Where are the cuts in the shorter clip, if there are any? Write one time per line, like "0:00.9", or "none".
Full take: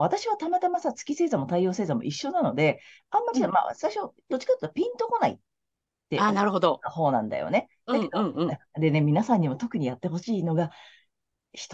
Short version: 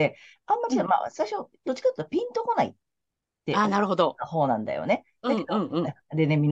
none